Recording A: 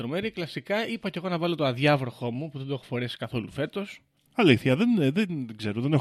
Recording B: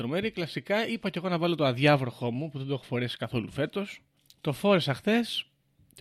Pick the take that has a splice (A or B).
A